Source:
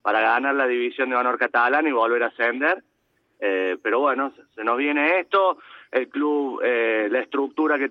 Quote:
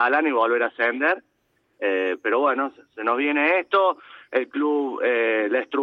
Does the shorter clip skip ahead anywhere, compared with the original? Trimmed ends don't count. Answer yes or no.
no